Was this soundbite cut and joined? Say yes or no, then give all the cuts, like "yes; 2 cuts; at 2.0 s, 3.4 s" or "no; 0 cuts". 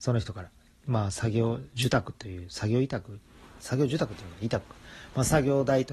yes; 1 cut; at 3.6 s